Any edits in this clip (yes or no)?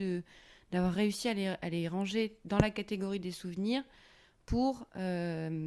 no